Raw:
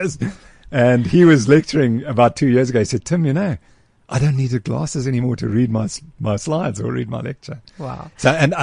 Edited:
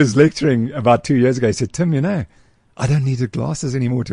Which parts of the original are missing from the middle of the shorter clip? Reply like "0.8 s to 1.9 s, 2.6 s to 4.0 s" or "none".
none